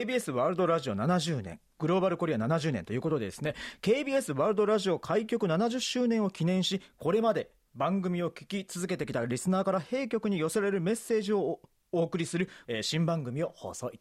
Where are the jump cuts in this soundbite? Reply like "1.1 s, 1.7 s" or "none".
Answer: 12.6 s